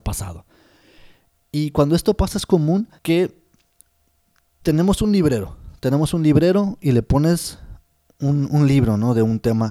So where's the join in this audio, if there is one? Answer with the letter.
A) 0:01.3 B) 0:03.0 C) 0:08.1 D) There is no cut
B